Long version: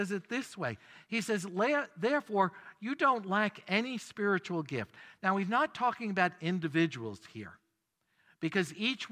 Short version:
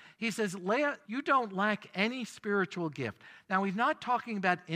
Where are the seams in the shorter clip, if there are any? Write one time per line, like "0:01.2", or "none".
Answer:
0:01.0